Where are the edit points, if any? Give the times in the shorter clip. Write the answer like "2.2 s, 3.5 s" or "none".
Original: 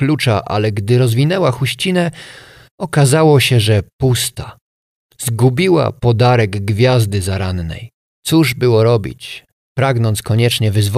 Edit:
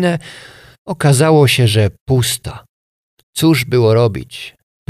3.2 s